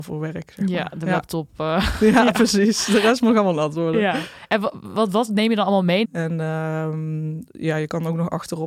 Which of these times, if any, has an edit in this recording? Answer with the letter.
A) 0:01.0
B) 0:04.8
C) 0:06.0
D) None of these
C